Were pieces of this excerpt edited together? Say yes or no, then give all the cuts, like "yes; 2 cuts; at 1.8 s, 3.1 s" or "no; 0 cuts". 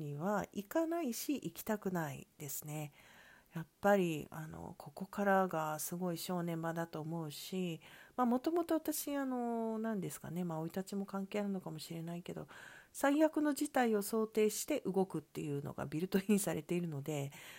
no; 0 cuts